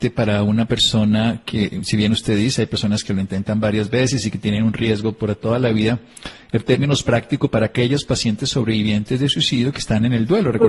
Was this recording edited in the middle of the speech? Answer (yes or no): no